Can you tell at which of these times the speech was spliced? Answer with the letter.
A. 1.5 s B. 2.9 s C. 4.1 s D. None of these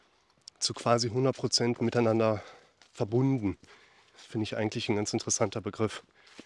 C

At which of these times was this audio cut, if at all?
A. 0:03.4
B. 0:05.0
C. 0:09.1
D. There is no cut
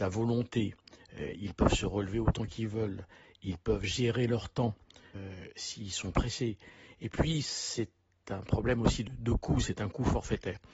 C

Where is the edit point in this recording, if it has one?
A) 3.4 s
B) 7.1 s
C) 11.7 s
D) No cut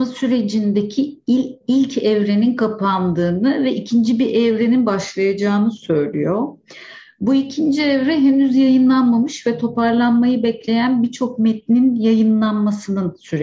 D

